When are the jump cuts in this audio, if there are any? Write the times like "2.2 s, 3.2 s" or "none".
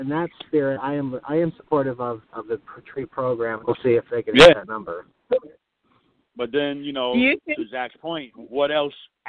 3.6 s